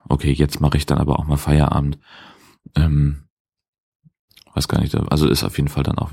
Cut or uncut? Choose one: uncut